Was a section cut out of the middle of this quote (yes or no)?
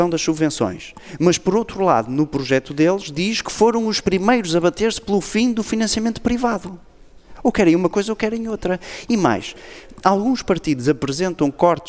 yes